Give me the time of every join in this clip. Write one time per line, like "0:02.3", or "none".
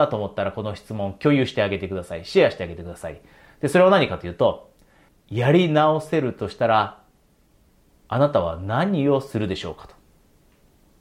0:05.1